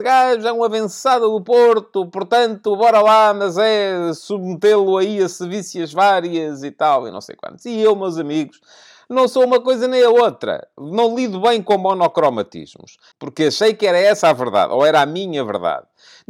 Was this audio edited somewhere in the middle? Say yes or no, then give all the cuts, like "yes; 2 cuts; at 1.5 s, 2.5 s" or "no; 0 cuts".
yes; 1 cut; at 13.1 s